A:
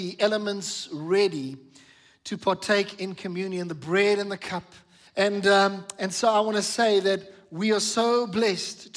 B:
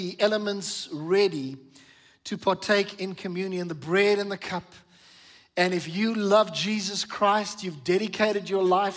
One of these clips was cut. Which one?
A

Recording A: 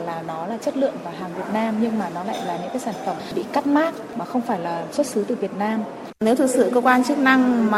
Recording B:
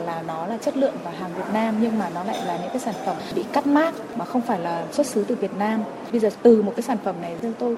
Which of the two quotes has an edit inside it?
A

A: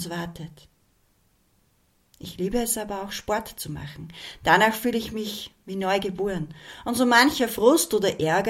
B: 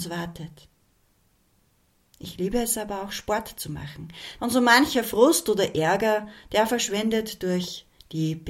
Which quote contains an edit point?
B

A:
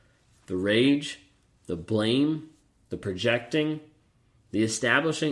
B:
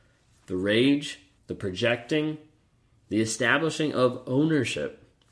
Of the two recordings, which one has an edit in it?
B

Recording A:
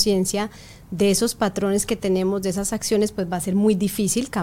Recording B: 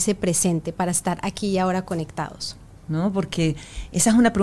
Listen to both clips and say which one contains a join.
B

